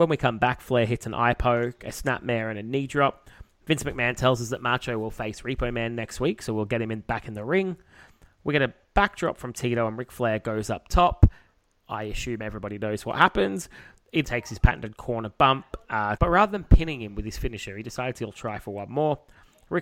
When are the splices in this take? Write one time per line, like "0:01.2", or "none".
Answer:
0:14.2
0:16.2